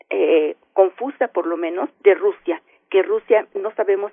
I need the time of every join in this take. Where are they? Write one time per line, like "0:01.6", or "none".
0:01.9